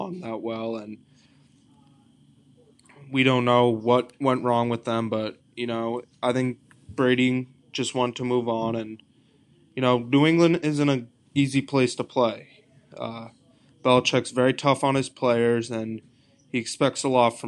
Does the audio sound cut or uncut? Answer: uncut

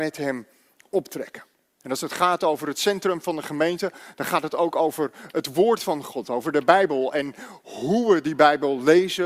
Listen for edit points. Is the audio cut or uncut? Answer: cut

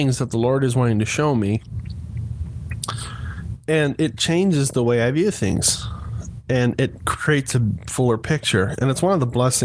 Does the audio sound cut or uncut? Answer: uncut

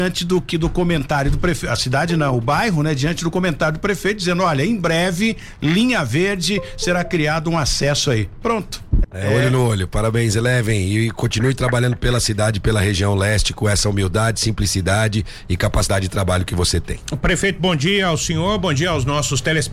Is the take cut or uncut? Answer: cut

